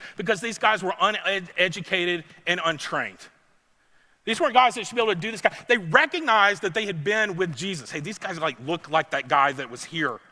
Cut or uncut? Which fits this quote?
uncut